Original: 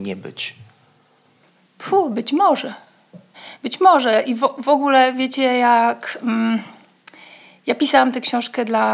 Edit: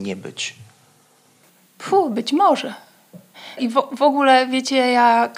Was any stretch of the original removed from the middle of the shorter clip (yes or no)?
yes